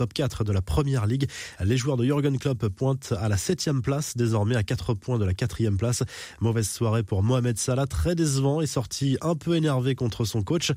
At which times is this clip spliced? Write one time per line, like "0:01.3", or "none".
0:01.6